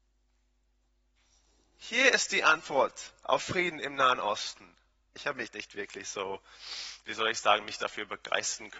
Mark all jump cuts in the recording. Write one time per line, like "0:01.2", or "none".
0:05.2